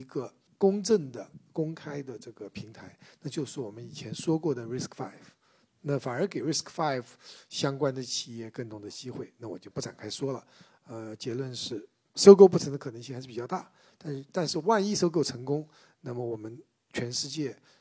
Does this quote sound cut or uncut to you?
uncut